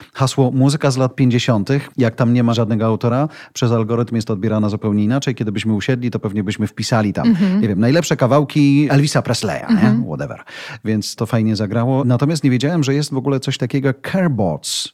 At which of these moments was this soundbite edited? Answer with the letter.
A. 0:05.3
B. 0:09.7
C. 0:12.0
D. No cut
D